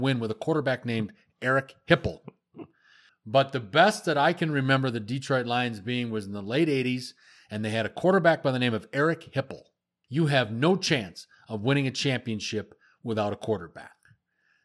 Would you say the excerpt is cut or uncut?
cut